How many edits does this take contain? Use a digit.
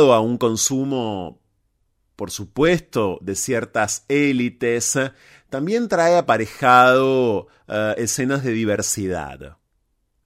0